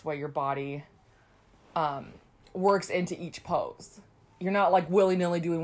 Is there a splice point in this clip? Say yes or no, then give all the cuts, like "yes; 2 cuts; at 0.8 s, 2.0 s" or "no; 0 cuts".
no; 0 cuts